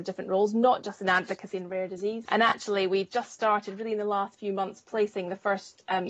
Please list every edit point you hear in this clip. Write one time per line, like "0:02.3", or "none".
0:02.3